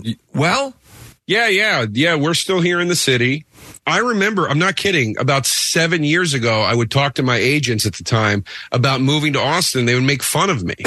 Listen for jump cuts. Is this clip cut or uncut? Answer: cut